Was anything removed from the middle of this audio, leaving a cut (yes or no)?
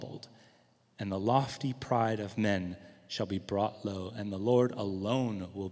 no